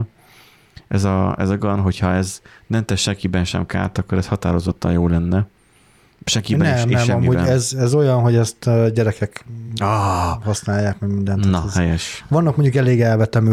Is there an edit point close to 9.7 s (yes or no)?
no